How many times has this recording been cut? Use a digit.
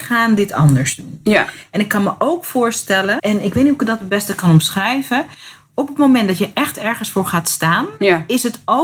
1